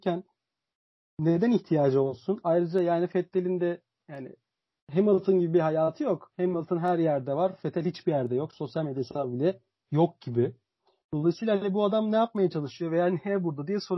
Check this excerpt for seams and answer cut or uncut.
uncut